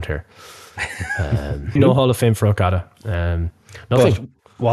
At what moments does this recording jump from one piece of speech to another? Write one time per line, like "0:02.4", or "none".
0:01.8